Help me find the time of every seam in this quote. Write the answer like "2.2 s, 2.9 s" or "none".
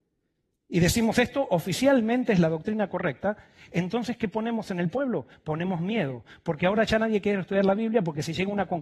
none